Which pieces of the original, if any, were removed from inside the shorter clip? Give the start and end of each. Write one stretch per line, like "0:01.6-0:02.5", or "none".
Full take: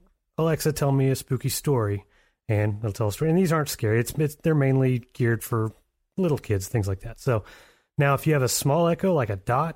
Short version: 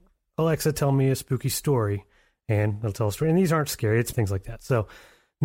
0:04.1-0:06.7